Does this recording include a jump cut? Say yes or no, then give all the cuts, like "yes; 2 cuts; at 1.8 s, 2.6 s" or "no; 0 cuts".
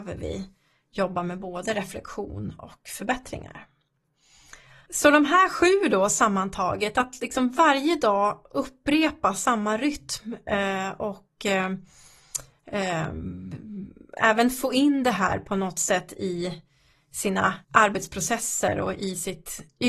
yes; 2 cuts; at 4.9 s, 17.6 s